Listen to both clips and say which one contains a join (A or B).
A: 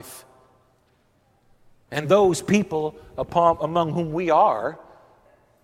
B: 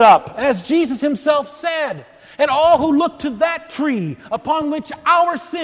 A